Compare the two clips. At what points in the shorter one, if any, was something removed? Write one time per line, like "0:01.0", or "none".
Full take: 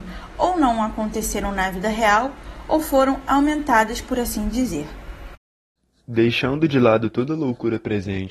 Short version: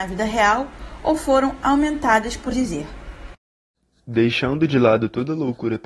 0:02.5